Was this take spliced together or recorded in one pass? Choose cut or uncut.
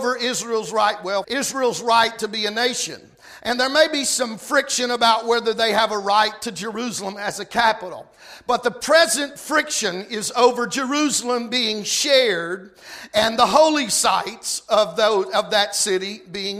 cut